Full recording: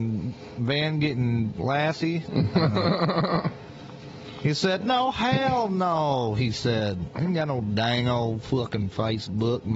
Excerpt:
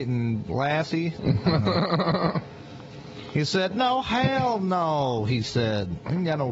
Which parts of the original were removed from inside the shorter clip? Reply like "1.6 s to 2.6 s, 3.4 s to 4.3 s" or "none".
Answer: none